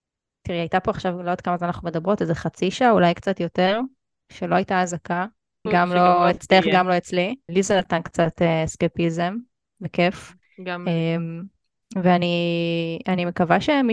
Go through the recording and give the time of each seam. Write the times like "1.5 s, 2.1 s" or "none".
5.7 s, 7.5 s